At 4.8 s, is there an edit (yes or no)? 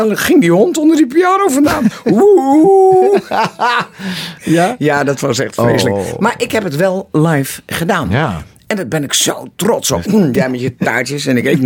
no